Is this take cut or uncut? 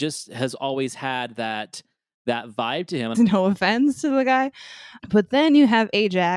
cut